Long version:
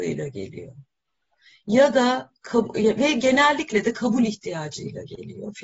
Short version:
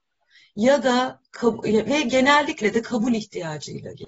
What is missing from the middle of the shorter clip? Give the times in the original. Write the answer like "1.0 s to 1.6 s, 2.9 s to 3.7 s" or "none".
none